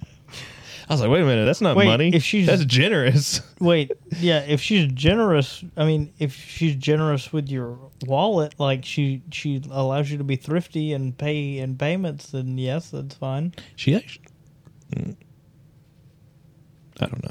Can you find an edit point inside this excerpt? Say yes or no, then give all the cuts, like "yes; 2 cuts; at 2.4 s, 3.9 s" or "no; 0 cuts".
no; 0 cuts